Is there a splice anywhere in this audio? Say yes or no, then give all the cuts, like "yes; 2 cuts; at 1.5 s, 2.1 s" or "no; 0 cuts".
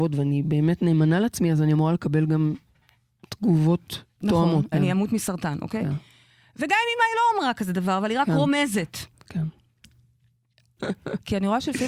yes; 2 cuts; at 4.7 s, 10.8 s